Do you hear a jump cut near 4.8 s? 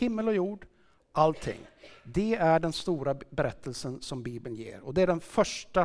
no; 0 cuts

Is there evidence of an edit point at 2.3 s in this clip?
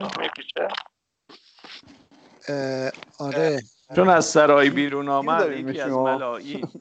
no; 1 cut; at 3.9 s

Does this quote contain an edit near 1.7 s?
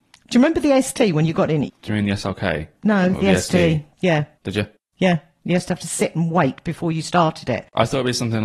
yes; 2 cuts; at 1.7 s, 4.4 s

